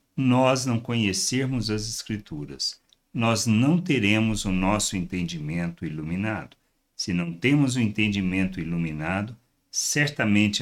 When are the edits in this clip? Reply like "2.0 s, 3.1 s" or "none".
none